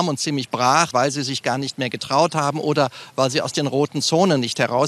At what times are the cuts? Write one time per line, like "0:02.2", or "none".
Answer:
0:00.9